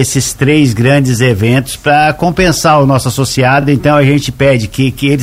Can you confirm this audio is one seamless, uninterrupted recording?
yes; 0 cuts

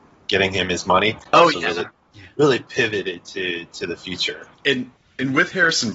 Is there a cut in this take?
yes; 2 cuts; at 1.3 s, 4.5 s

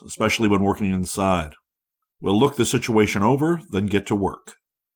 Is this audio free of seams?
no; 1 cut; at 2.0 s

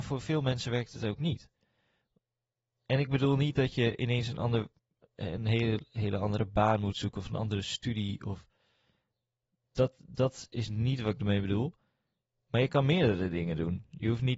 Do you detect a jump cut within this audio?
no; 0 cuts

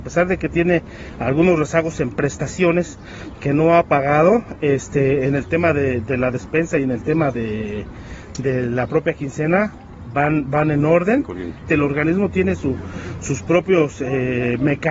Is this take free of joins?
no; 1 cut; at 11.7 s

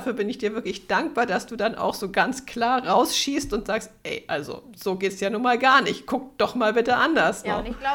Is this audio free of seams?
yes; 0 cuts

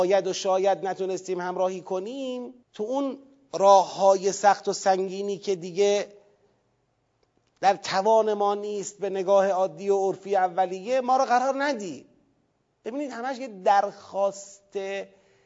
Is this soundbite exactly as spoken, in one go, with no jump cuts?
no; 1 cut; at 2.6 s

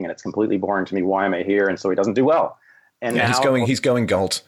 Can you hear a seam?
no; 0 cuts

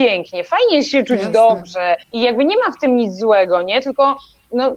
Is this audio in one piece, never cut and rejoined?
no; 1 cut; at 2.0 s

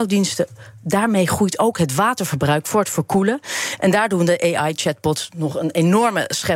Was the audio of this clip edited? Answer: no; 0 cuts

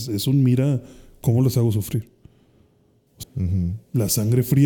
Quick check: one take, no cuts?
no; 1 cut; at 3.2 s

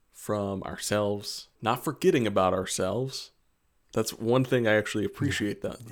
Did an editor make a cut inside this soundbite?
no; 0 cuts

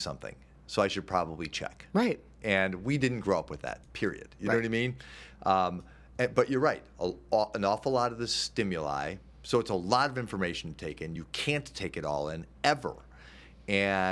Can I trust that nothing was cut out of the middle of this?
yes; 0 cuts

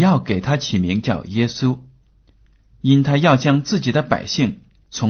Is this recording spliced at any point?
no; 0 cuts

